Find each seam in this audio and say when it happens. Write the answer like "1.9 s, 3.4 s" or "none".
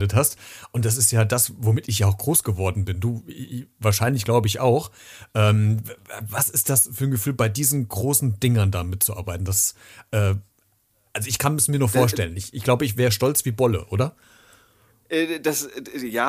none